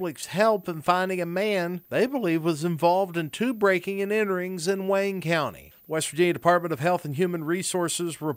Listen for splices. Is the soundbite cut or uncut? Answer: cut